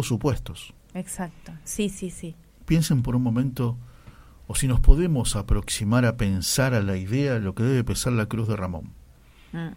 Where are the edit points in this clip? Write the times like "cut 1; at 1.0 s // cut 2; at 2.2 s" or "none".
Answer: cut 1; at 2.6 s